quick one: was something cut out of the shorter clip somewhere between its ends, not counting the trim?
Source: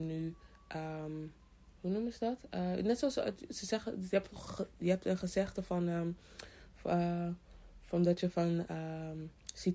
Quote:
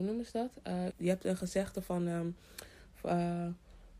yes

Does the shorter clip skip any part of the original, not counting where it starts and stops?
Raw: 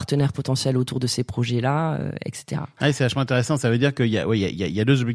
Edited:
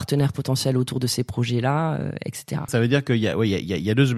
yes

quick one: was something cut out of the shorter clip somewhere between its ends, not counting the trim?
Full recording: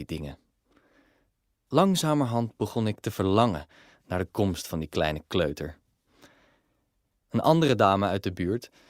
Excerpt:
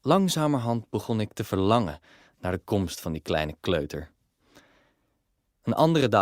no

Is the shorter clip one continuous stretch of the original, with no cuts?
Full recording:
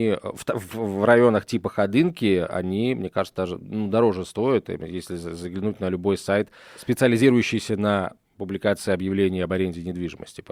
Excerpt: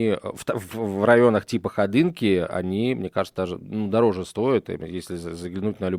yes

